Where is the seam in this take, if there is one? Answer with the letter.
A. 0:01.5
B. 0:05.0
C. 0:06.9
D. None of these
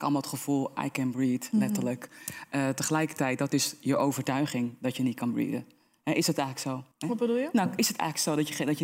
C